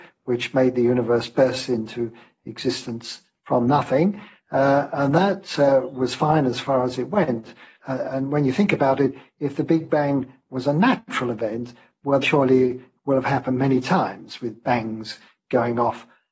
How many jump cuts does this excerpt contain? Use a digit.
2